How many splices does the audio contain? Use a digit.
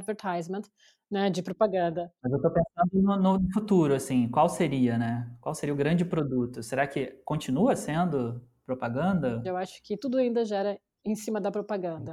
0